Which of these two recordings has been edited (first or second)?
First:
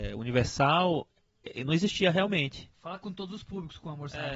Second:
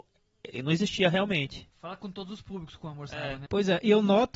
second